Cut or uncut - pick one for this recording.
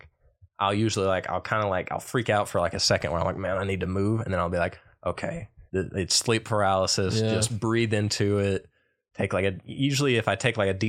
cut